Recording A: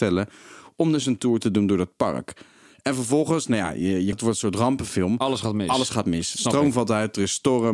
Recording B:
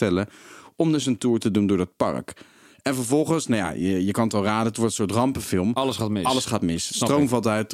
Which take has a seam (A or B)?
A